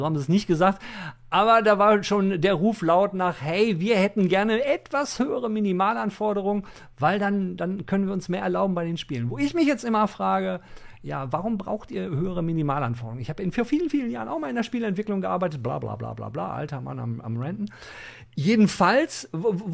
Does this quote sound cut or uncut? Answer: uncut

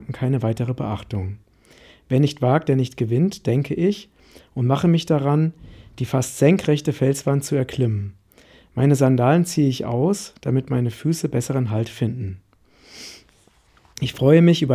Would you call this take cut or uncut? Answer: uncut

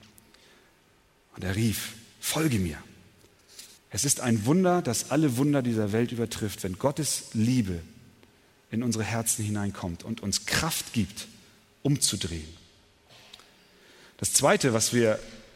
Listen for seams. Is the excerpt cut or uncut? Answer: cut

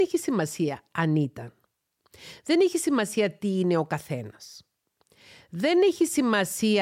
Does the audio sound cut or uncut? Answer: uncut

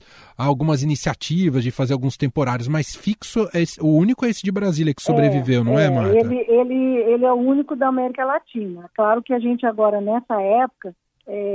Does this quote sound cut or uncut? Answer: uncut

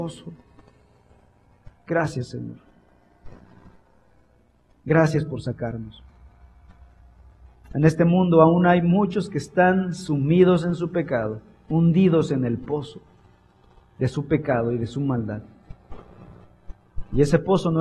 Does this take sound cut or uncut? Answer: uncut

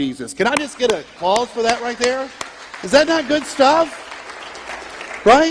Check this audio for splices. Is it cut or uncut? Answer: cut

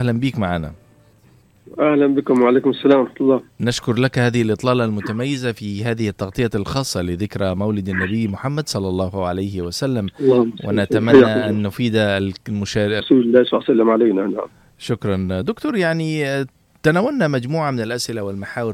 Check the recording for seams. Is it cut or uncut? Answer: cut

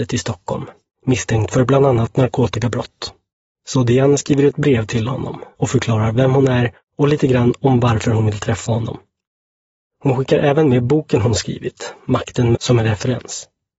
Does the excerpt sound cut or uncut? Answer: cut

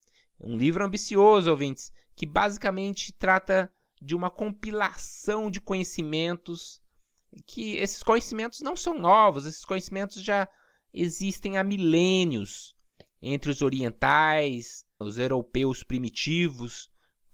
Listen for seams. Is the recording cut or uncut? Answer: cut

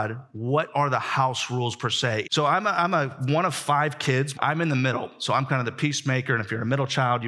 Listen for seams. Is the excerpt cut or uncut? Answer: cut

